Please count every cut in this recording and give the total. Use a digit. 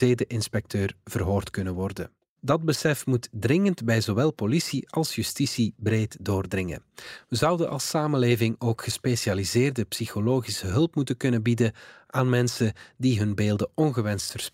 1